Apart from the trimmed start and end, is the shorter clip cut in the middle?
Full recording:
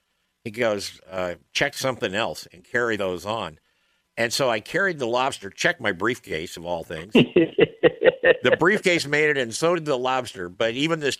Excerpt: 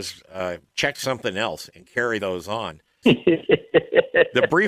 yes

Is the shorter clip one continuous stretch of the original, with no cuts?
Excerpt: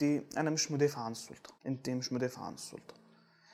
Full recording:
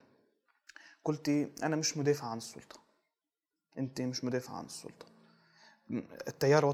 no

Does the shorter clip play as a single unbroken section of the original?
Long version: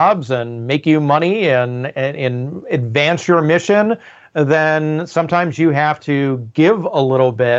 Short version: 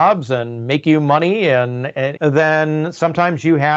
no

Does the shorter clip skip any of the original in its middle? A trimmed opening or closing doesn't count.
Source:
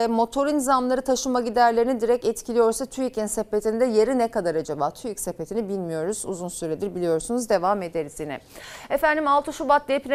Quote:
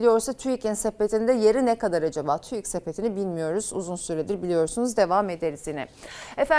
no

